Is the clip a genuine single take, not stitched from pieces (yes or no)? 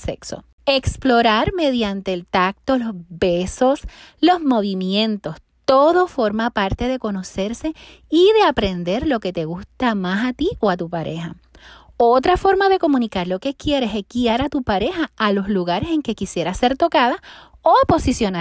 yes